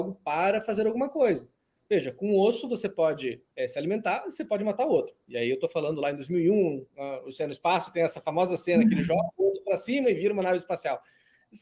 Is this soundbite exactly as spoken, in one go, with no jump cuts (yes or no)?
yes